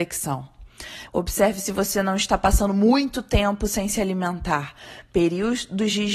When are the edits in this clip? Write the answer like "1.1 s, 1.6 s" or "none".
1.1 s

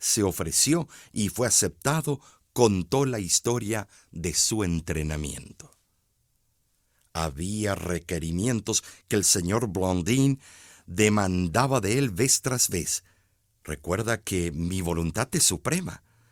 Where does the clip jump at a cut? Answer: none

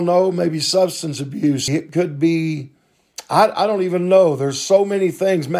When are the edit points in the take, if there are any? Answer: 1.7 s

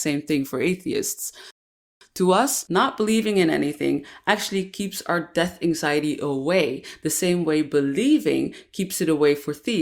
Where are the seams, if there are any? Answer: none

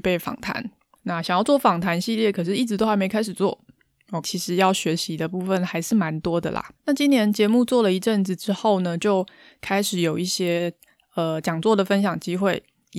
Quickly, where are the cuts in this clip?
1.0 s, 4.2 s, 6.8 s

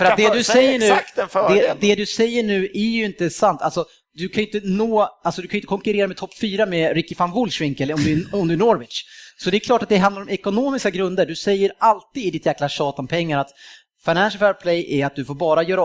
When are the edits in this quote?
none

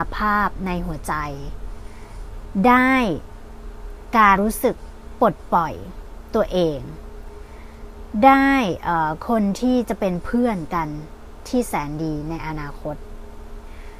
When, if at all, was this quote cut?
4.4 s

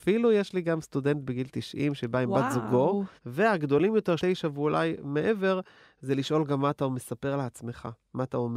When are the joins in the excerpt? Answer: 3.2 s, 4.2 s

